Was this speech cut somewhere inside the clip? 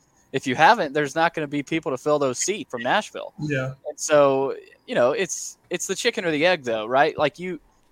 yes; 1 cut; at 2.7 s

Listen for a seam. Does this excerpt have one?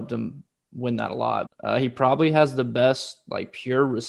yes; 1 cut; at 1.5 s

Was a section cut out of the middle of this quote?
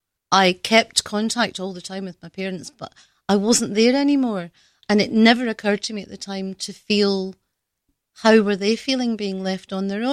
yes; 1 cut; at 4.8 s

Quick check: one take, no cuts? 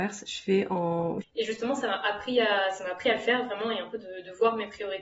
no; 1 cut; at 1.2 s

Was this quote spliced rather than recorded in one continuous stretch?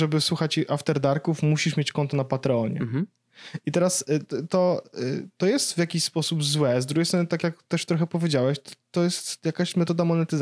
no; 0 cuts

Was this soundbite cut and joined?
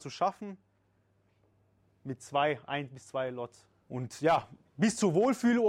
yes; 1 cut; at 3.8 s

